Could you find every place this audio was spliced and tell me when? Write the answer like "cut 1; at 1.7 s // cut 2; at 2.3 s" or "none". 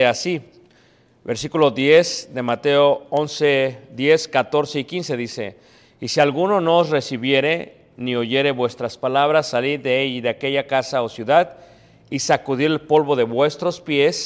none